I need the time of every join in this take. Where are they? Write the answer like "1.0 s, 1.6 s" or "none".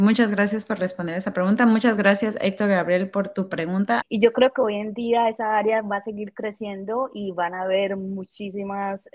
4.0 s